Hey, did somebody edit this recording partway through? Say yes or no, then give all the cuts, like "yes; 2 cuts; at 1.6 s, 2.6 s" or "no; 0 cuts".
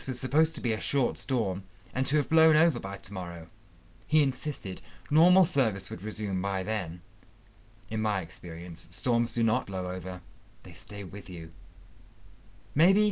yes; 1 cut; at 9.6 s